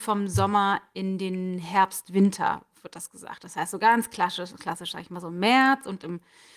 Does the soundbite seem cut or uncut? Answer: uncut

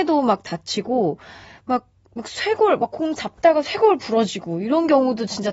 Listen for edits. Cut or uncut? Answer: uncut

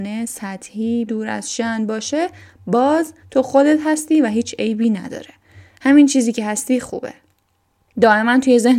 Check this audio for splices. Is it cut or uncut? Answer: cut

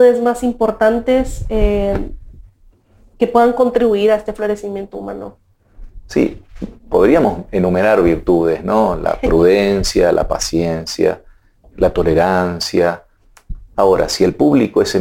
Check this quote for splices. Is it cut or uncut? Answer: cut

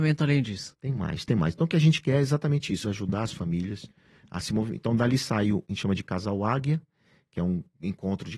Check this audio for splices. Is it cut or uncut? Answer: cut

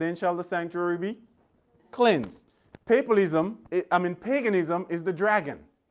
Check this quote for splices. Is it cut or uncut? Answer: uncut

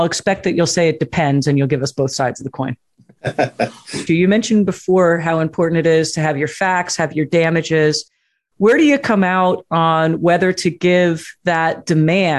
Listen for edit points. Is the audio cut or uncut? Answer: cut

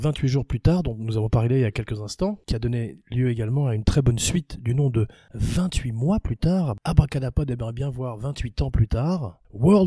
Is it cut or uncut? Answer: uncut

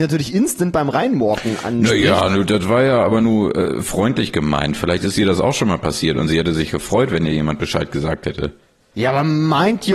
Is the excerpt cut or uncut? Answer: uncut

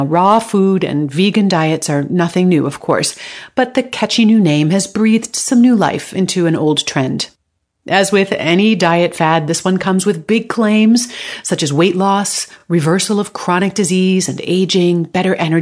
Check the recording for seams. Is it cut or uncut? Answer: uncut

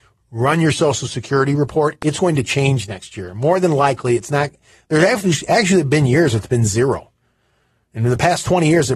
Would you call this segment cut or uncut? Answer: uncut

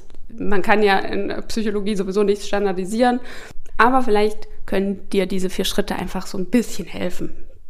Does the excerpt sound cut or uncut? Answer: cut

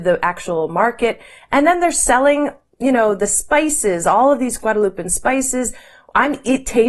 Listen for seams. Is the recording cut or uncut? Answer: uncut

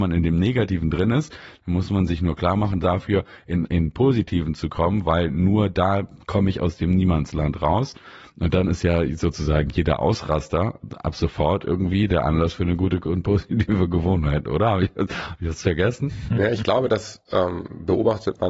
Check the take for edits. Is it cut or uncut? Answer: cut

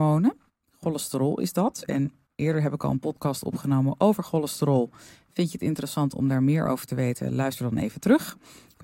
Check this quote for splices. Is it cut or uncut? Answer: uncut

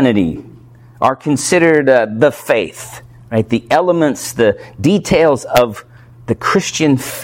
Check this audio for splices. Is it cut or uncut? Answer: uncut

